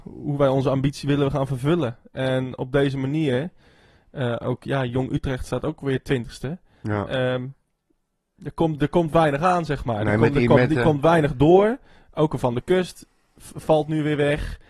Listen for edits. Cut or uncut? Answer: uncut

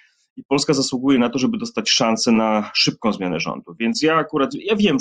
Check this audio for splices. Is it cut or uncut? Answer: uncut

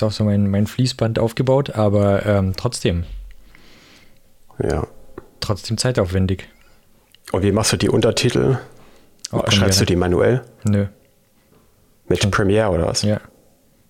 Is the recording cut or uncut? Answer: uncut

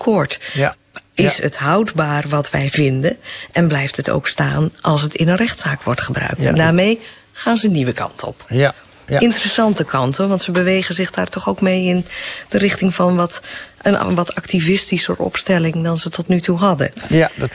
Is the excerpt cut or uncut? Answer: uncut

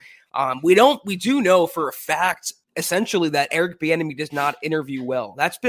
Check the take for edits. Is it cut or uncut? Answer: cut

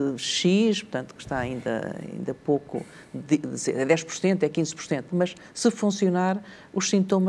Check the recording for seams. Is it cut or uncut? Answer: cut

